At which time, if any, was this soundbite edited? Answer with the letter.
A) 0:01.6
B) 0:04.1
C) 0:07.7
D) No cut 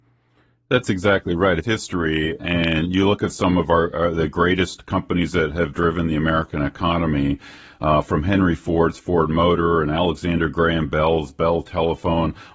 A